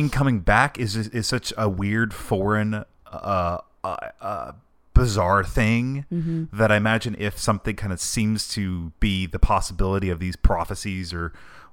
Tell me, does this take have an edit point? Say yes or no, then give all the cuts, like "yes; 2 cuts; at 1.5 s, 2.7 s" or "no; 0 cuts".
no; 0 cuts